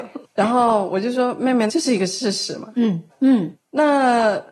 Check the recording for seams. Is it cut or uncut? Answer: cut